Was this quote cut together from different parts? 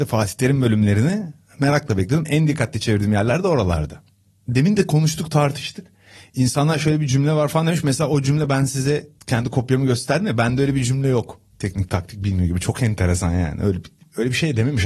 no; 0 cuts

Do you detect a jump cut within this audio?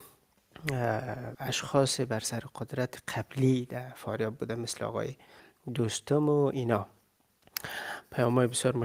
no; 0 cuts

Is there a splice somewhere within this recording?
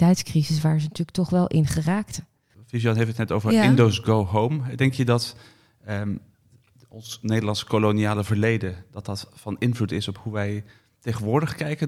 no; 0 cuts

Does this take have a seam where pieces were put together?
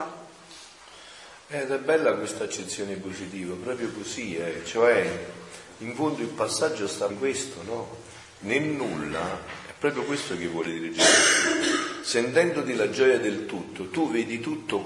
yes; 1 cut; at 7.1 s

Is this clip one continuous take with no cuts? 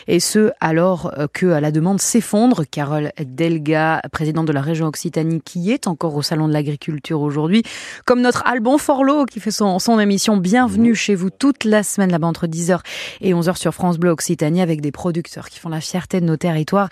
no; 1 cut; at 2.7 s

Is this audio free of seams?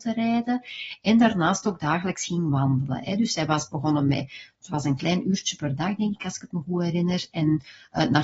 yes; 0 cuts

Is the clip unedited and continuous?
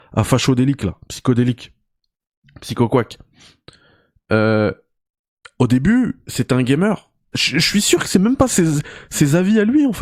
no; 1 cut; at 7.3 s

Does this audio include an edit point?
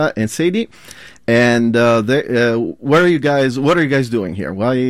no; 0 cuts

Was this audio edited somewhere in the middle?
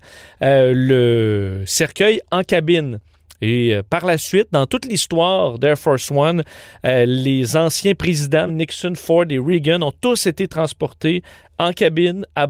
yes; 1 cut; at 8.5 s

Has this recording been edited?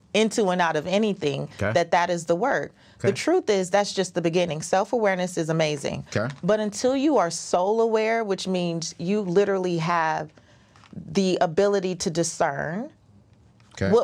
no; 0 cuts

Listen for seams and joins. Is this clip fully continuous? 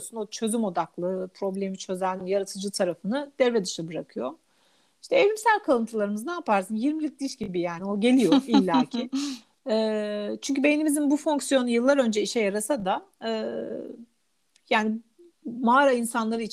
no; 1 cut; at 2.2 s

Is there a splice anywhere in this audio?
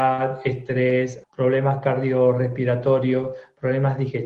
yes; 1 cut; at 1.2 s

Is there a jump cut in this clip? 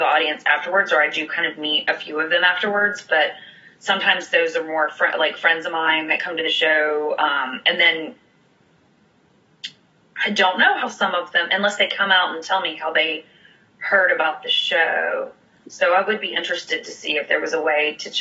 no; 0 cuts

